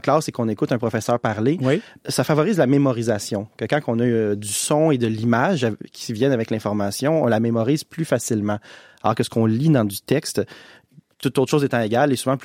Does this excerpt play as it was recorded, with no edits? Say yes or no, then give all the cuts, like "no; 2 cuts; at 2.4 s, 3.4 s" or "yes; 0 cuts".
yes; 0 cuts